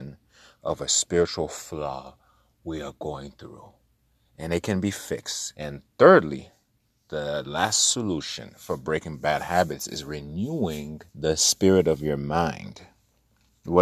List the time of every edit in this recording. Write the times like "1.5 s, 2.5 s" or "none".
5.5 s, 11.1 s